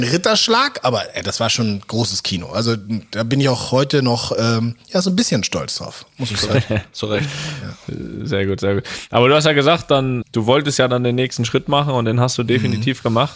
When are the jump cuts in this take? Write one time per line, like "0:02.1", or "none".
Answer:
0:10.2